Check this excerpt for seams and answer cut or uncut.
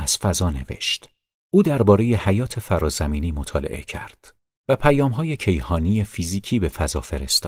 cut